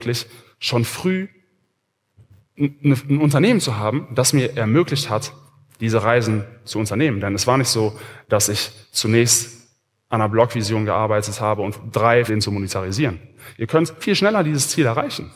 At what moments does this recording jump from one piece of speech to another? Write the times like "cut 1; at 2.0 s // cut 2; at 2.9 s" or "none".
cut 1; at 12.3 s // cut 2; at 14.0 s